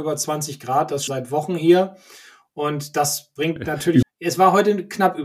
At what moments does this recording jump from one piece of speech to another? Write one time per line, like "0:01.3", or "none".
0:01.1
0:04.0